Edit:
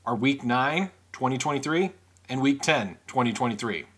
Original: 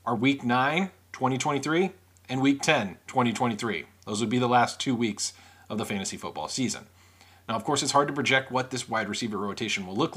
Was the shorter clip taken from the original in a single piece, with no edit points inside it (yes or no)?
yes